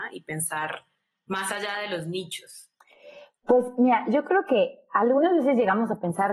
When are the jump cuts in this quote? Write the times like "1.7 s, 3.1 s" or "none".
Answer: none